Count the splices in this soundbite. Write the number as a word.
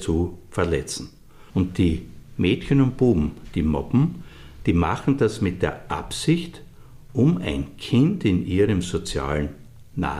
one